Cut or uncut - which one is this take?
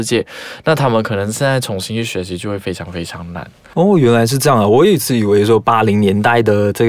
uncut